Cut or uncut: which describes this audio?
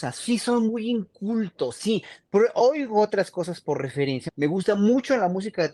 cut